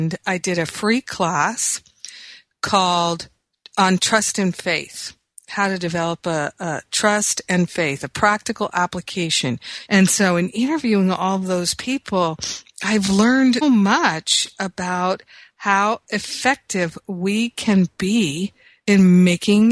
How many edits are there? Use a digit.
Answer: 2